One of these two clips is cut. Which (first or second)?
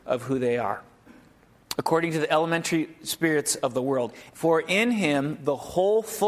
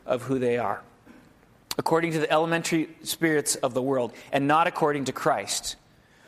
first